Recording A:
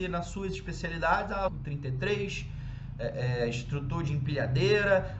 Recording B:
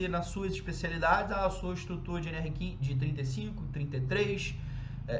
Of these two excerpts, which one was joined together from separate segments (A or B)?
A